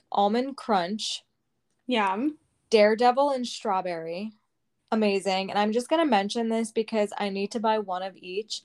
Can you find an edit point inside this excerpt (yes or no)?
yes